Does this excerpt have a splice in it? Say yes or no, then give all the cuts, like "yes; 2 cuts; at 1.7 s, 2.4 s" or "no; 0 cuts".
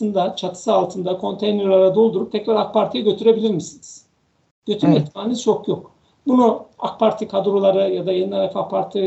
no; 0 cuts